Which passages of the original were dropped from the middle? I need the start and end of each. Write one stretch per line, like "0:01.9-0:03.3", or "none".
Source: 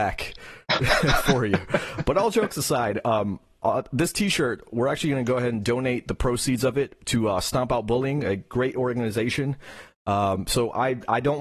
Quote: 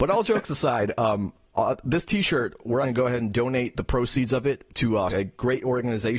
0:04.9-0:05.1
0:07.4-0:08.2